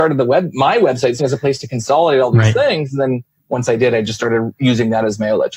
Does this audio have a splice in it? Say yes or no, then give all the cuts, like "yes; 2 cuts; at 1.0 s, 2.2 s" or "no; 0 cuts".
yes; 1 cut; at 1.2 s